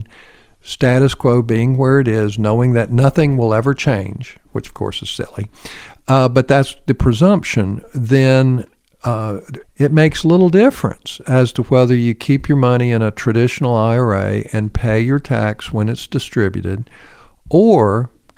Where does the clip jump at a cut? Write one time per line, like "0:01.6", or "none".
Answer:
0:09.6